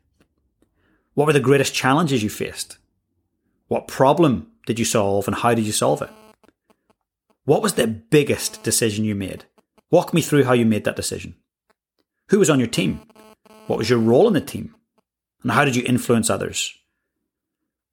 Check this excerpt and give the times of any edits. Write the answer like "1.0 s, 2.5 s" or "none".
none